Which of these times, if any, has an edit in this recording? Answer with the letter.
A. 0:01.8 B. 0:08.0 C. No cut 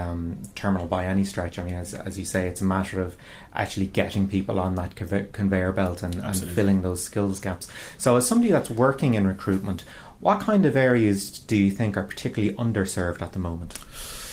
C